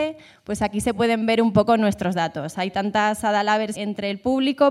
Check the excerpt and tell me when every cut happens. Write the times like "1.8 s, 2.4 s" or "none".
3.8 s